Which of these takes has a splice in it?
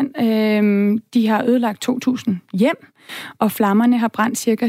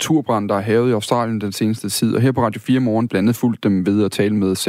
second; 1 cut; at 3.1 s

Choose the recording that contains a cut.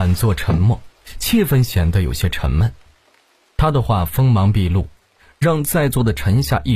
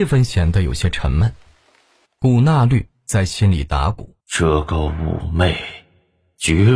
second; 2 cuts; at 2.1 s, 4.2 s

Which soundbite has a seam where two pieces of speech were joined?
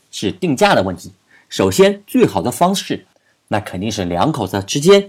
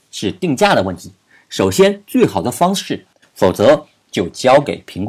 second; 1 cut; at 3.2 s

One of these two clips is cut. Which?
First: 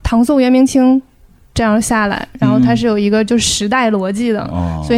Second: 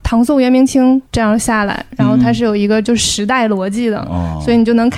second; 1 cut; at 1.1 s

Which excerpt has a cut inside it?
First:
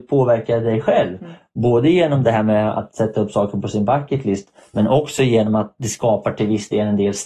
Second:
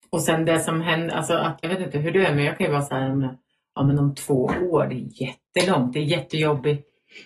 second; 1 cut; at 1.6 s

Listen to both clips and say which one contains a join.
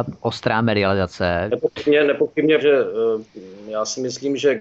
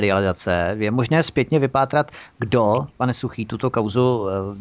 first; 2 cuts; at 1.5 s, 2.6 s

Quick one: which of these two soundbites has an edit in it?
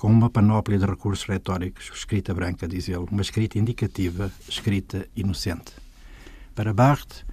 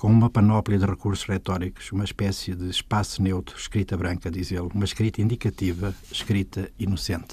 first; 1 cut; at 1.9 s

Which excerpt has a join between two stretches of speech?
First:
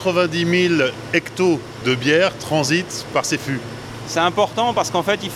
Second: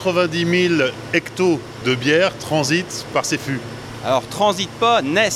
first; 1 cut; at 4.0 s

